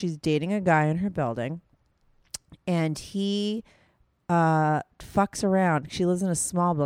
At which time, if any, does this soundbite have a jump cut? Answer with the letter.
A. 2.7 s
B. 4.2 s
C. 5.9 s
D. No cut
D